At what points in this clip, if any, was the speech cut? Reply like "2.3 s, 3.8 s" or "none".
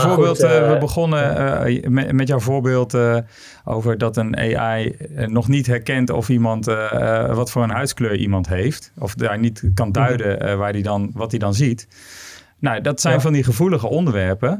1.6 s